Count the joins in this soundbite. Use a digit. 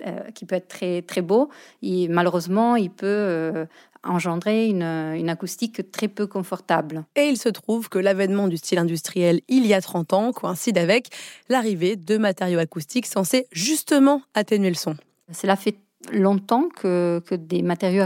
0